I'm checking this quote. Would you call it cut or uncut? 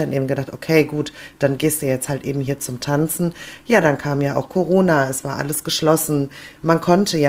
uncut